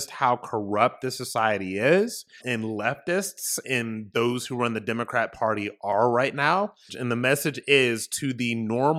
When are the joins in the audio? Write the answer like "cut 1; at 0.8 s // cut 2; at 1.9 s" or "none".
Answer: cut 1; at 2.4 s // cut 2; at 3.6 s // cut 3; at 6.9 s